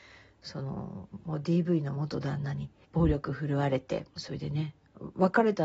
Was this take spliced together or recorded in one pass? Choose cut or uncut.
cut